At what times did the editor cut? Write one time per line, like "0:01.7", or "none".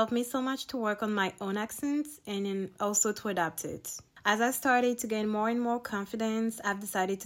none

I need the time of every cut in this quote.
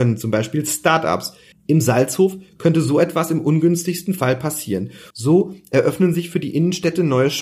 0:01.5
0:05.1

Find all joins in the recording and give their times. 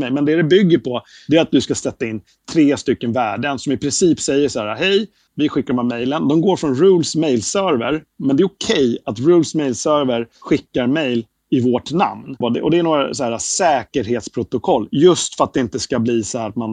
0:05.3
0:12.4

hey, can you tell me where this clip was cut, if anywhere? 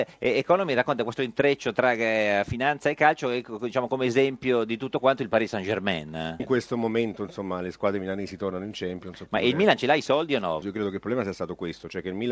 0:06.4
0:10.6

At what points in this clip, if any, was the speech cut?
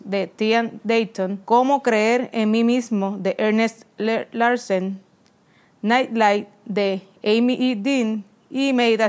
0:01.4

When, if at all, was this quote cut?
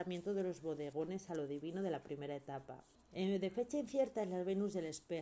0:02.9

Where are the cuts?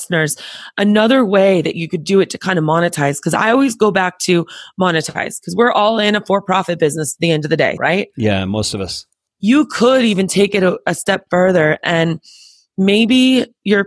0:07.8

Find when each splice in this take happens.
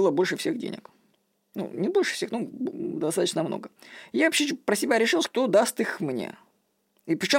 0:02.5
0:05.2

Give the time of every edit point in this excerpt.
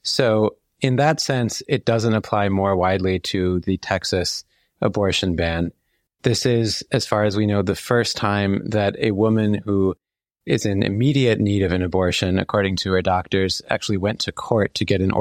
0:06.1

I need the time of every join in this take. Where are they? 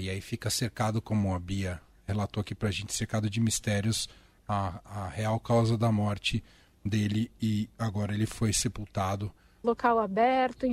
0:09.6

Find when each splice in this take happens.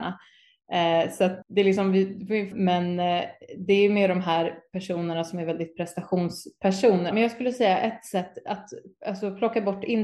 0:01.4
0:02.5
0:07.1

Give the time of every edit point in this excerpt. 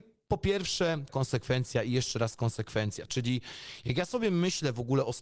0:01.1

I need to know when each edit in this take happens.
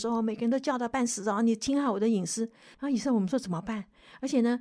0:02.7

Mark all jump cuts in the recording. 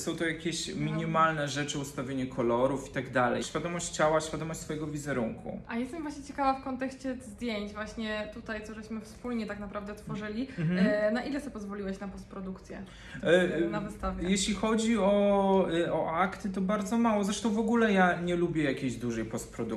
0:03.4

